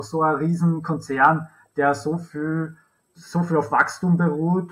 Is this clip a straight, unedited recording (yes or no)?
no